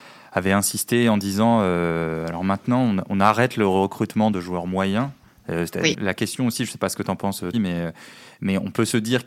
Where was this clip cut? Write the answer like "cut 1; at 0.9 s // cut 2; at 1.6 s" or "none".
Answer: cut 1; at 5.9 s // cut 2; at 7.5 s